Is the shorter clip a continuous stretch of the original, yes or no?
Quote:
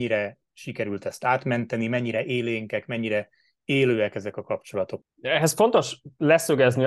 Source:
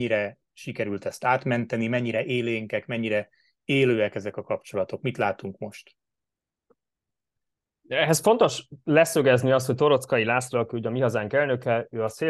no